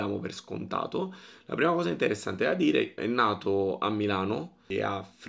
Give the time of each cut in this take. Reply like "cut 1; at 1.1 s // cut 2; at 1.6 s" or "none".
cut 1; at 1.3 s // cut 2; at 3.0 s